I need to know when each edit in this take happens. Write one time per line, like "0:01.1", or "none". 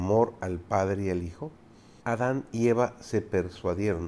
0:02.0